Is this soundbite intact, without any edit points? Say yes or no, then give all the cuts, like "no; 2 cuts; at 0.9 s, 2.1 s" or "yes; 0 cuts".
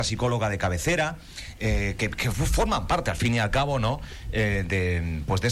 yes; 0 cuts